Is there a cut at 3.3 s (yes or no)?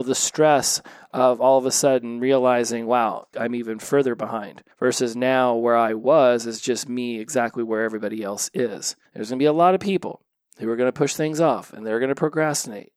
yes